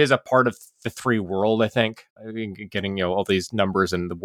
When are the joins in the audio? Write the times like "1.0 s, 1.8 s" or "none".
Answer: 2.1 s

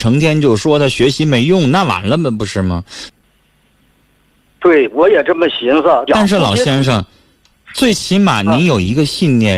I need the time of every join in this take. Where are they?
3.1 s, 6.1 s

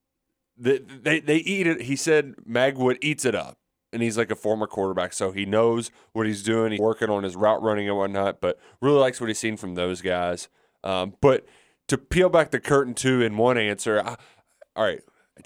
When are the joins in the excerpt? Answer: 6.8 s

